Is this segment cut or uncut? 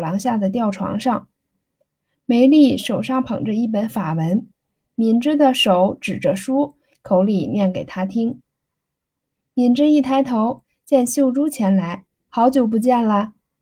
cut